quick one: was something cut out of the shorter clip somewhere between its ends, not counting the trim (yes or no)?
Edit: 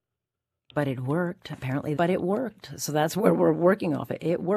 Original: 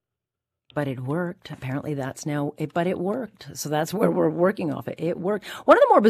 yes